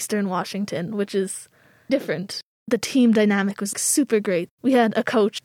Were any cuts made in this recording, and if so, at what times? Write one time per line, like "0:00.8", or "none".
0:01.9
0:03.7

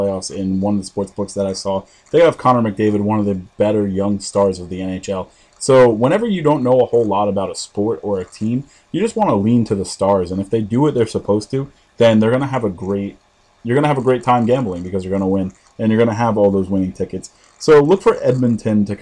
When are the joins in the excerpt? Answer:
none

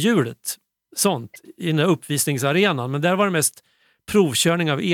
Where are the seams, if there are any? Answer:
none

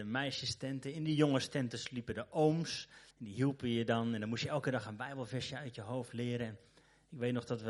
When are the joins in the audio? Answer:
0:03.1

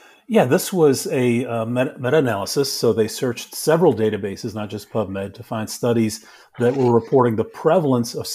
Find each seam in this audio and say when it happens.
none

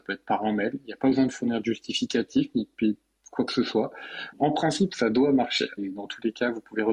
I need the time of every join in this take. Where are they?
0:04.3
0:05.8

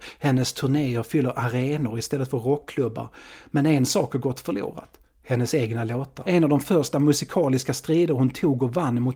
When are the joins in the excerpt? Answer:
0:06.2

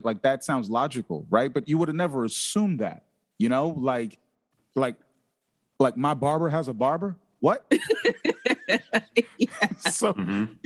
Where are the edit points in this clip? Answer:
none

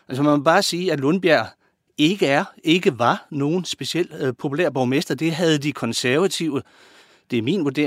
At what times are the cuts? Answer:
0:04.4

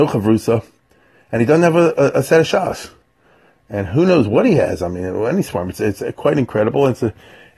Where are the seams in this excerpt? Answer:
none

